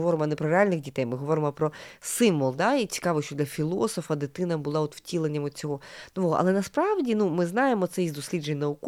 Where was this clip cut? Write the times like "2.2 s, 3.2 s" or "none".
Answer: none